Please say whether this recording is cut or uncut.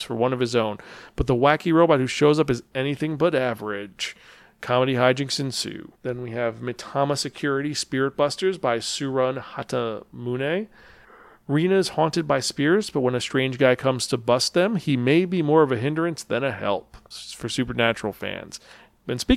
cut